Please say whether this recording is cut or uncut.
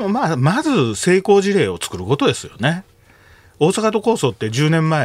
uncut